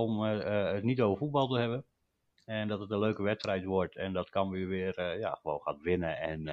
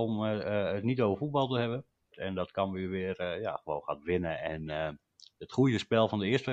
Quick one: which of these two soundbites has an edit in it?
second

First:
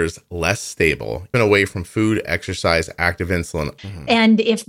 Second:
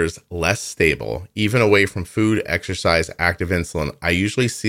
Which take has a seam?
first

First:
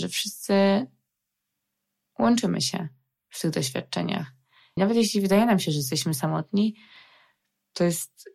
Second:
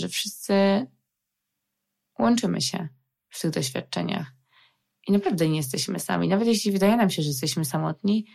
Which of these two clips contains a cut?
first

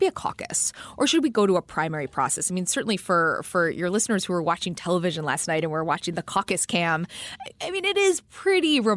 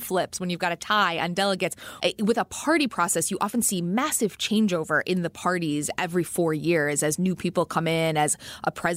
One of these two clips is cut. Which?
second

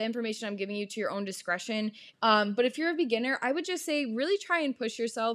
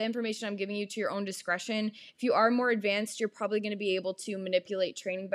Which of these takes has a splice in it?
first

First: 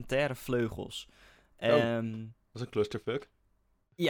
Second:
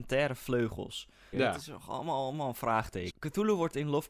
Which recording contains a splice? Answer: second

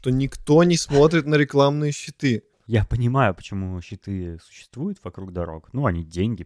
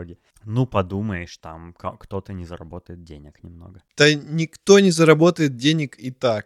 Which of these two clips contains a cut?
first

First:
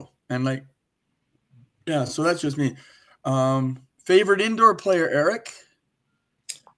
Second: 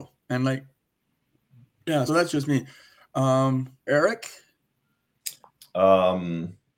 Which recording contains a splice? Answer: second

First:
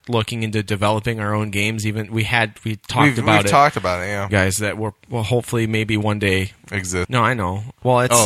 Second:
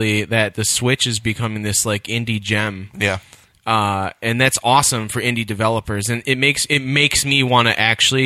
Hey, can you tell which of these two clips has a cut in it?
first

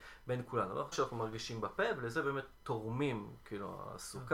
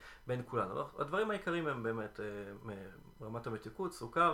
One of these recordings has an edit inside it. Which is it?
first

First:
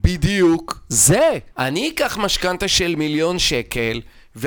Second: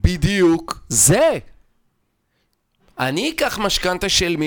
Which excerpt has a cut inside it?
first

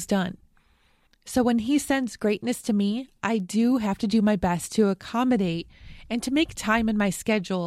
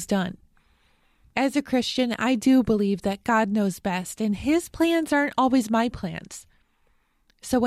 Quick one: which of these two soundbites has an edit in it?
first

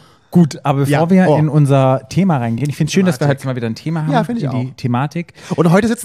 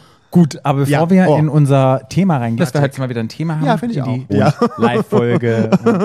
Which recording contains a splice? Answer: second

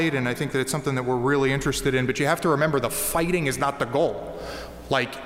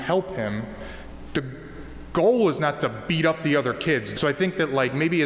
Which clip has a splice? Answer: second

